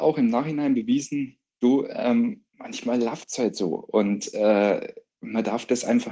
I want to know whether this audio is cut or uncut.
cut